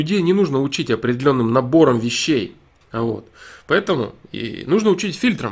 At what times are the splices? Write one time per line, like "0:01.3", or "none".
0:02.8